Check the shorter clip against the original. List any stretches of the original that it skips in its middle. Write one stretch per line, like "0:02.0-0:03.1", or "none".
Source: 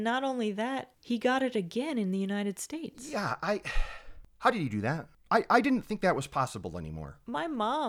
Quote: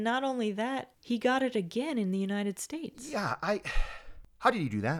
none